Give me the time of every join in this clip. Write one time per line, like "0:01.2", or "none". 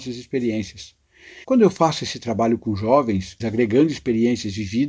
0:01.4
0:03.4